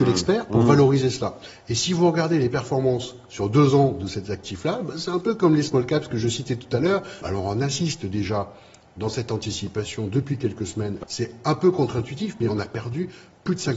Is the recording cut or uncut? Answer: cut